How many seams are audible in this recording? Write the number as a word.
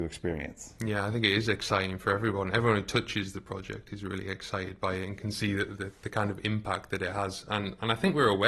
zero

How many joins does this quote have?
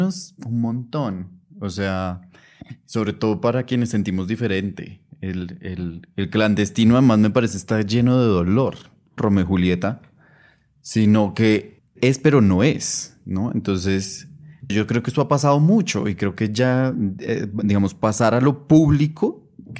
two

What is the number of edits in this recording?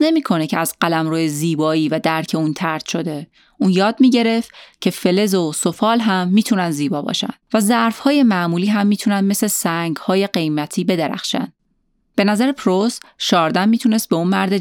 two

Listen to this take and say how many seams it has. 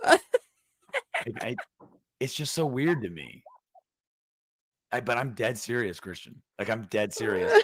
zero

